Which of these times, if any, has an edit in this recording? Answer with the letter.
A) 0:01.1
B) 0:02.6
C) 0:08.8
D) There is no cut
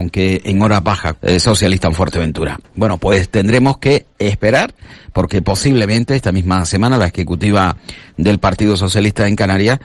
A